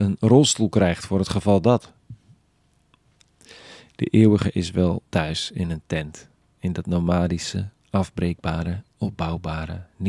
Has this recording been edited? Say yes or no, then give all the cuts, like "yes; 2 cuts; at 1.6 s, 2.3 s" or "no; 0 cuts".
no; 0 cuts